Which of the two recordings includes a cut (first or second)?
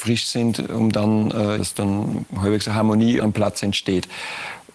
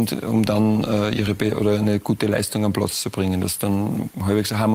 first